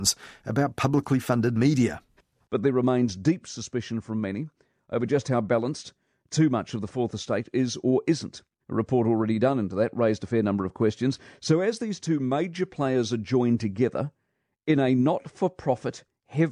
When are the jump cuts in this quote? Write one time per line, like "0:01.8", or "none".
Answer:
0:08.6